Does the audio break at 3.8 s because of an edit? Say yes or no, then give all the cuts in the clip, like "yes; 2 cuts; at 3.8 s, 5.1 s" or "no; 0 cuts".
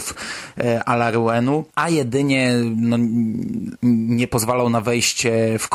no; 1 cut; at 1.7 s